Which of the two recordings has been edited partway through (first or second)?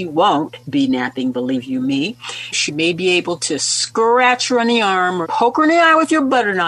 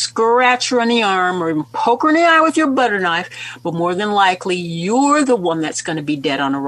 first